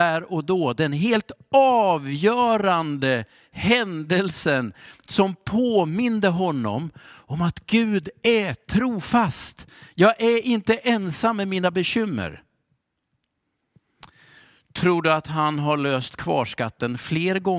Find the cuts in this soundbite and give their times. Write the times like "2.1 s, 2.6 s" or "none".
none